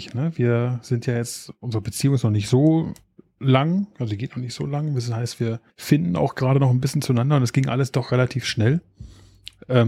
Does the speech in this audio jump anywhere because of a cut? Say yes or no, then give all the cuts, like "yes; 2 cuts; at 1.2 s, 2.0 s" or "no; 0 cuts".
yes; 1 cut; at 5.7 s